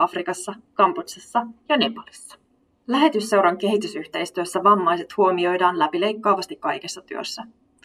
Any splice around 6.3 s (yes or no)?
no